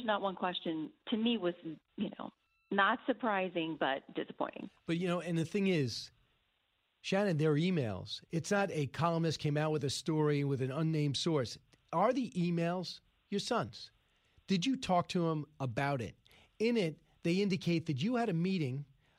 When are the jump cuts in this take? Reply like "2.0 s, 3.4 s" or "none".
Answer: none